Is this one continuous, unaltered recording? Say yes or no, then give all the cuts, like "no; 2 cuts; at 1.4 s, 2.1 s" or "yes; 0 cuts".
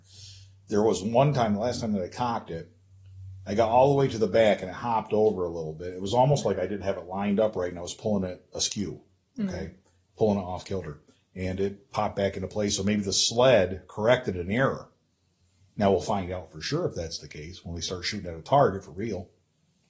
yes; 0 cuts